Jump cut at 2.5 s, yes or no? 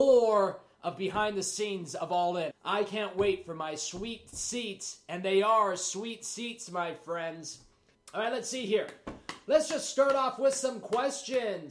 yes